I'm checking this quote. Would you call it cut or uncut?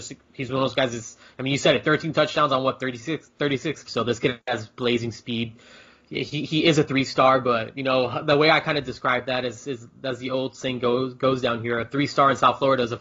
cut